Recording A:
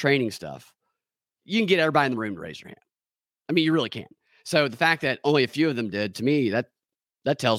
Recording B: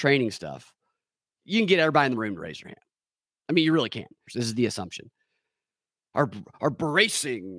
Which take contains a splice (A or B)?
B